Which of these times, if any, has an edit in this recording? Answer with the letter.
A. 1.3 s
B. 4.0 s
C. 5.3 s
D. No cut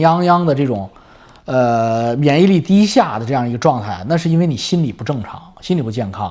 D